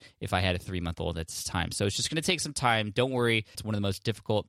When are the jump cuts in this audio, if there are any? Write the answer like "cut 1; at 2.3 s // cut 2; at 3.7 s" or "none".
cut 1; at 3.5 s